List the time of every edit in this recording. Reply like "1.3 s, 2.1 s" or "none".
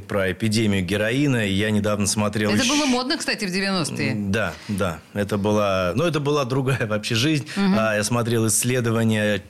none